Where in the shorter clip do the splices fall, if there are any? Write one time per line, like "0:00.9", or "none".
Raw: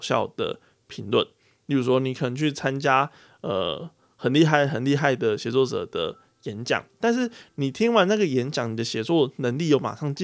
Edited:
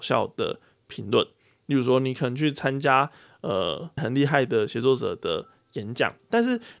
0:04.0